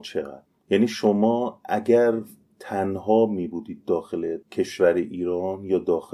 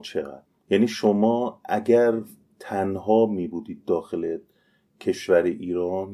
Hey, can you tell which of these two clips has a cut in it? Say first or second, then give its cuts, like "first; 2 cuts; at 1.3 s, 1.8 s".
first; 1 cut; at 4.4 s